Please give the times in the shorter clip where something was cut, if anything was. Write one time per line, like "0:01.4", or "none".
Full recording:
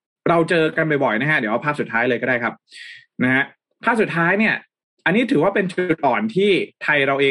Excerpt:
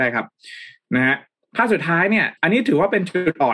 0:02.4

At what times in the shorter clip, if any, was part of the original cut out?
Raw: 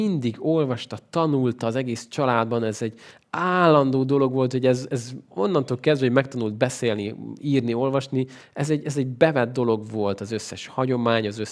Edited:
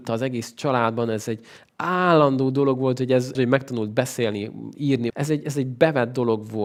0:03.3
0:05.1

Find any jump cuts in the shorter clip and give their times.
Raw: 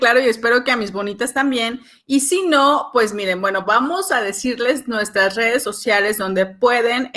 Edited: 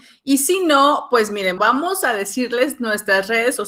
0:01.6

